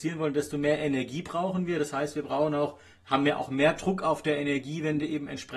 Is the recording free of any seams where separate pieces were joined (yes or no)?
yes